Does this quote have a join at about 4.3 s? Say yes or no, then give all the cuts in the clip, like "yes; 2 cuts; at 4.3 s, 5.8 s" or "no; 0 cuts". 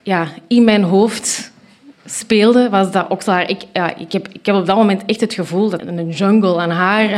no; 1 cut; at 5.8 s